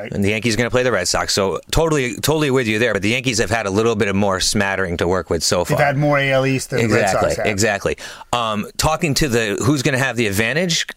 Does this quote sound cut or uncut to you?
uncut